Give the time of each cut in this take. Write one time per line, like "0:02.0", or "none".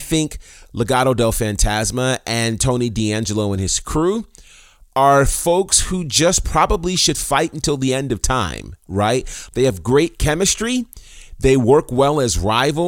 none